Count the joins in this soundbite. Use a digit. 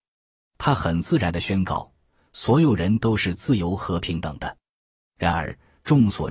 0